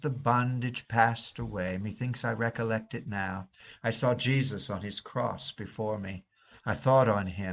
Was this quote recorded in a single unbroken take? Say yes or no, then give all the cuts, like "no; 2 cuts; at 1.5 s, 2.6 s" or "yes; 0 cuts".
yes; 0 cuts